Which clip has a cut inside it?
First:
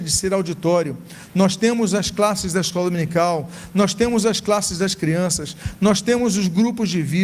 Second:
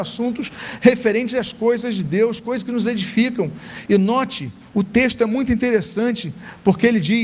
second; 1 cut; at 3.9 s

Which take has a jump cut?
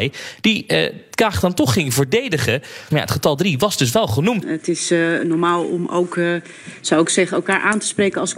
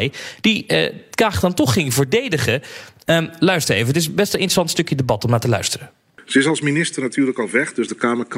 first; 2 cuts; at 2.9 s, 4.4 s

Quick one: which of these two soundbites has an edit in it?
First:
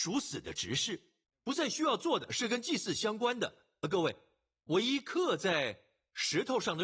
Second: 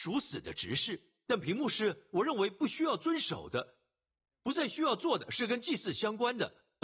first; 1 cut; at 1.2 s

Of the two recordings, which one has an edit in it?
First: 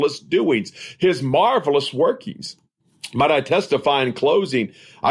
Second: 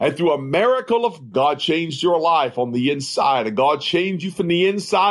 second; 1 cut; at 1.3 s

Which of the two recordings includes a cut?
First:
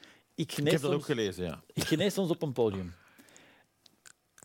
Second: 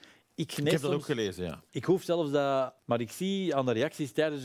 second; 2 cuts; at 1.7 s, 2.8 s

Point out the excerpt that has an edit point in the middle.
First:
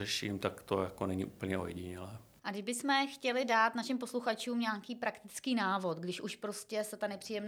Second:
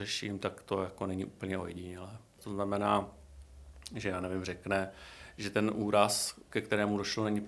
second; 1 cut; at 2.4 s

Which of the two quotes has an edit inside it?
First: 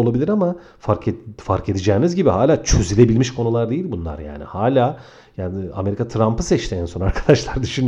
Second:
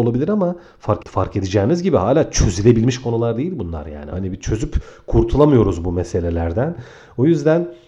second; 2 cuts; at 1.0 s, 4.1 s

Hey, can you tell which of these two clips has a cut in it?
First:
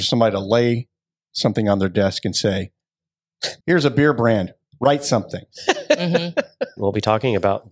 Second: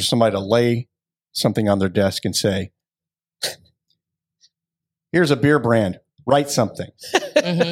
first; 2 cuts; at 3.6 s, 6.8 s

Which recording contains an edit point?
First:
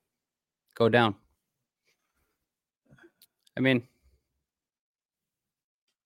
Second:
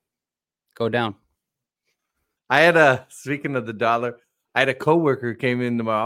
second; 1 cut; at 2.4 s

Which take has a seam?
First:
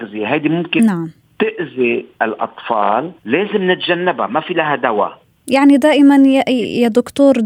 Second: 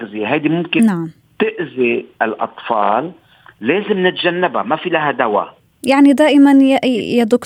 first; 1 cut; at 3.2 s

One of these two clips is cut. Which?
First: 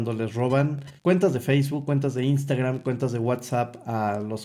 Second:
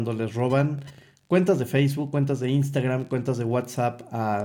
first; 1 cut; at 1.0 s

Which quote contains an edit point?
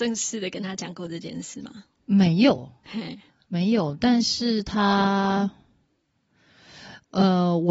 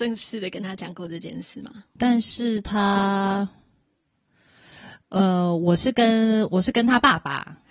second; 1 cut; at 2.0 s

